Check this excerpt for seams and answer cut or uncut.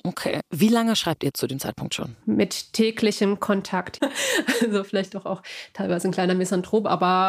cut